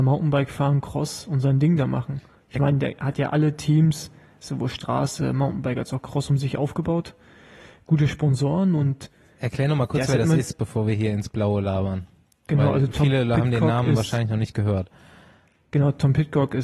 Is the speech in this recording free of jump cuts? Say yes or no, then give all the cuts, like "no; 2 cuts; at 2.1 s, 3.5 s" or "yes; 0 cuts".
yes; 0 cuts